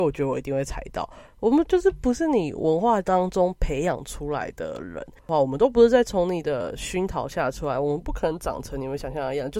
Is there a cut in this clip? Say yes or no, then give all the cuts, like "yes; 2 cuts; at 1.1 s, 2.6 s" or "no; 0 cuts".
no; 0 cuts